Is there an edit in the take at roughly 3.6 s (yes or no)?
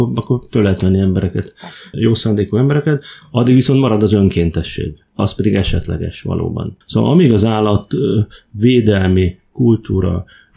no